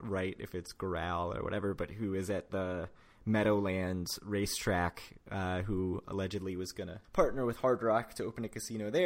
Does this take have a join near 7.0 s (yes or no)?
yes